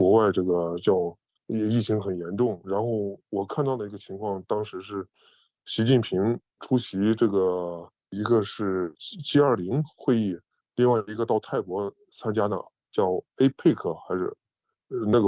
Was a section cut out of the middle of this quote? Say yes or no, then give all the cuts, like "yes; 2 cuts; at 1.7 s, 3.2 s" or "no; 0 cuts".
no; 0 cuts